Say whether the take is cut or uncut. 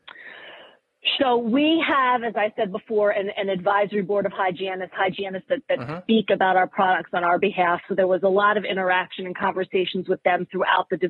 cut